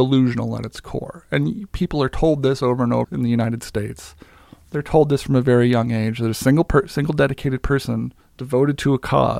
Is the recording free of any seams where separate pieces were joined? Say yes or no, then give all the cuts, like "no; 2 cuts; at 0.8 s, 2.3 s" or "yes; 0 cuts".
no; 1 cut; at 3.0 s